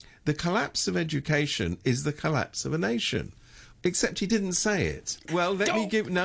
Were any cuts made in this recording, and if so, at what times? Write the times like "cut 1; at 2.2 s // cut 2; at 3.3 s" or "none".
cut 1; at 3.7 s // cut 2; at 5.3 s